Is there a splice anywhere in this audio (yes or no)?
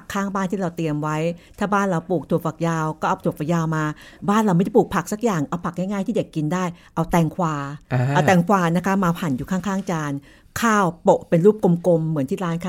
no